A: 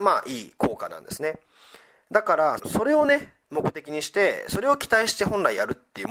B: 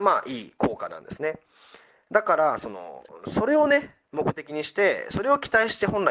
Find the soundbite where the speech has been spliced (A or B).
A